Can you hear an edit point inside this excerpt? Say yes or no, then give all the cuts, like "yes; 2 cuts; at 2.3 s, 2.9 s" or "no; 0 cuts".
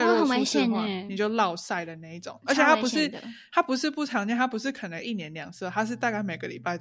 no; 0 cuts